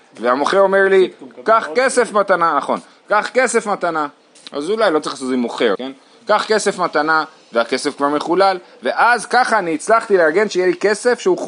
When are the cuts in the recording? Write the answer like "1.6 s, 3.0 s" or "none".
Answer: 5.7 s